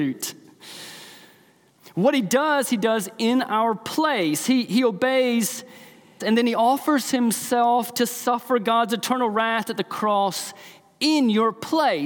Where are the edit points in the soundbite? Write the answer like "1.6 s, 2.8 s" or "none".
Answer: 6.2 s